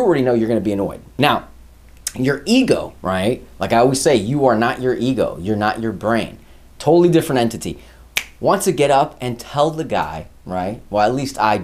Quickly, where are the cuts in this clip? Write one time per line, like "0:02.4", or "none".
0:03.0

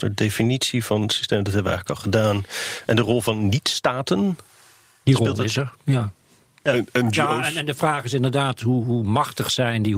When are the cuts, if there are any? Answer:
none

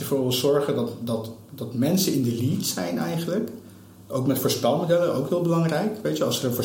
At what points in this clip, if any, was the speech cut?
none

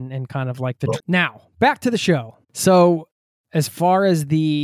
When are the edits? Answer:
0:01.0
0:02.4

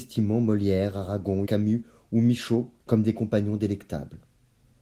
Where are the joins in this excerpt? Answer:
0:01.5
0:02.8

